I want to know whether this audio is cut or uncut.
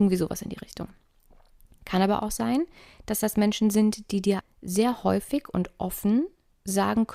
cut